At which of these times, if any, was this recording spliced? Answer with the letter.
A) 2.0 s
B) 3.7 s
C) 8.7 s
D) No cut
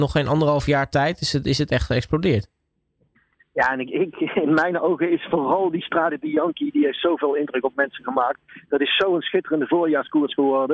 D